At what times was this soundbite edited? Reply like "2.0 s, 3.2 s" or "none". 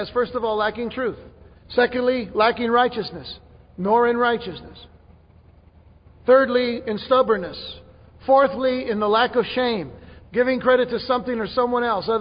1.6 s, 10.2 s